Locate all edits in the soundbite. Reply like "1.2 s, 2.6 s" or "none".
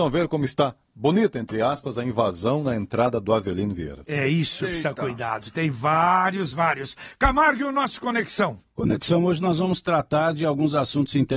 6.5 s